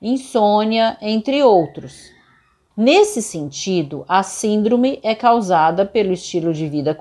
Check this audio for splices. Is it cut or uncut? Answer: cut